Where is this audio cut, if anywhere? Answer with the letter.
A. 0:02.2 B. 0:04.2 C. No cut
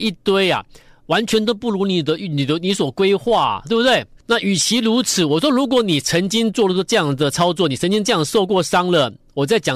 B